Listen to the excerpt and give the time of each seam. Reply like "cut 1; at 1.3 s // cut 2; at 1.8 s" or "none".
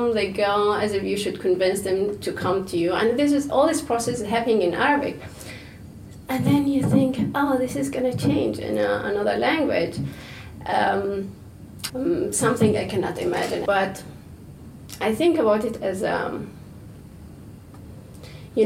cut 1; at 11.9 s // cut 2; at 13.7 s